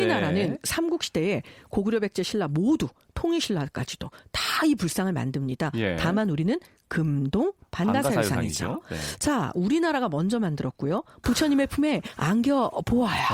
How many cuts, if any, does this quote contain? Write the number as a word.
two